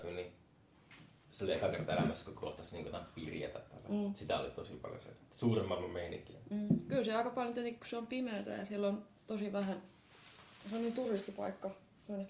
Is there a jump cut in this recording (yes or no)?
no